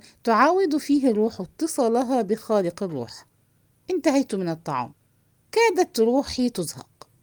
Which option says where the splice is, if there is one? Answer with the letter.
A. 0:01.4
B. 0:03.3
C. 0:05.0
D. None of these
D